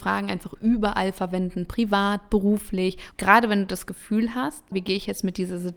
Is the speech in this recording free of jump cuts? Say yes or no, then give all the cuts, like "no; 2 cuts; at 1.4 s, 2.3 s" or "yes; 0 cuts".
no; 2 cuts; at 3.1 s, 4.7 s